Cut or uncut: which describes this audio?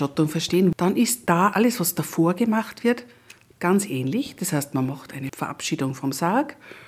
cut